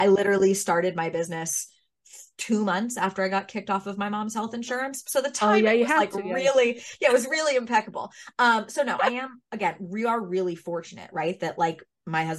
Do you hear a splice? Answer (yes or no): no